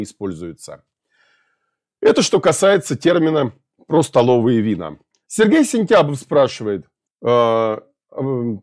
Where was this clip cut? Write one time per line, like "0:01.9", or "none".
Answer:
0:05.2
0:07.1

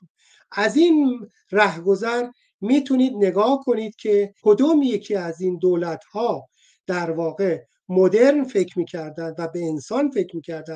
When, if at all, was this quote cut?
0:04.4

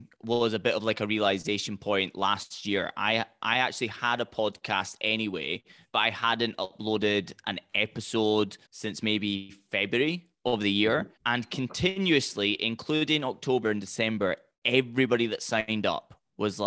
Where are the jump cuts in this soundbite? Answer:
0:08.7
0:11.2
0:13.6

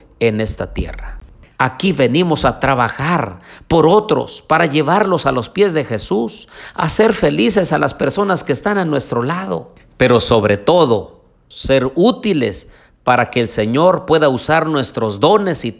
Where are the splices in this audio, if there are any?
0:01.5
0:11.5

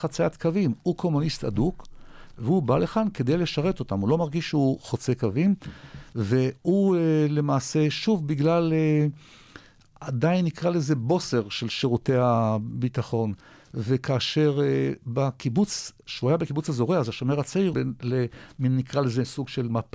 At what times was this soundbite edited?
0:17.7

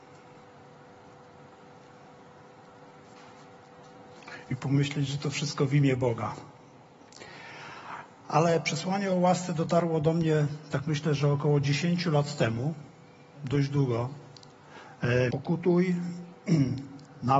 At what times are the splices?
0:13.3
0:15.3

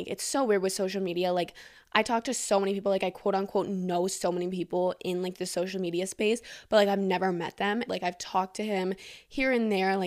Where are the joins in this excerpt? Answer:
0:07.9

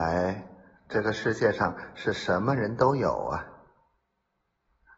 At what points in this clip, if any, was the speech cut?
none

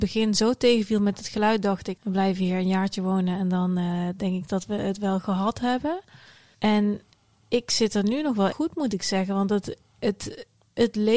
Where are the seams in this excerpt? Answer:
0:02.0
0:06.5
0:08.5

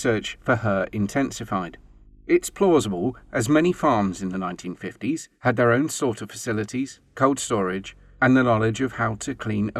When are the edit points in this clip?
none

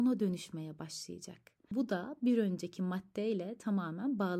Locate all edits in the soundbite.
none

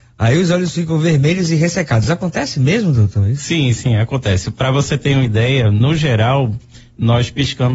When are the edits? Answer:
none

